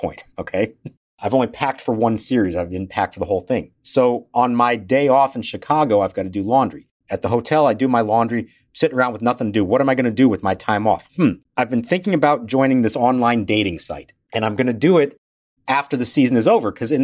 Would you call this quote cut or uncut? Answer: uncut